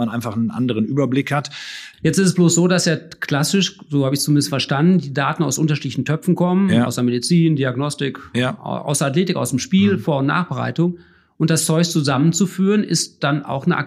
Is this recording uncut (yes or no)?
no